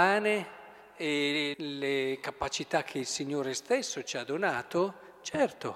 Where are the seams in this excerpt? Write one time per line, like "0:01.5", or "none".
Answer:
0:01.5